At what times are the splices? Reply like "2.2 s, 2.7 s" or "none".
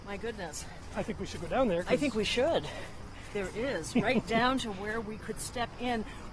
3.3 s